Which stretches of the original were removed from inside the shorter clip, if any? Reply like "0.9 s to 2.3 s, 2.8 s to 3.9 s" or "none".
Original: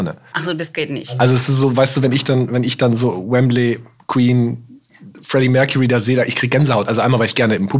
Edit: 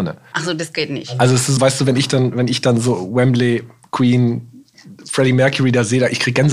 1.6 s to 1.7 s